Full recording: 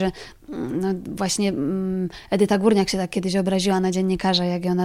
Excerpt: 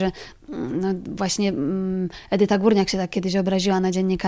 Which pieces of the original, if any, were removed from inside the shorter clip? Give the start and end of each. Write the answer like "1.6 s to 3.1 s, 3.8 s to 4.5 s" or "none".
none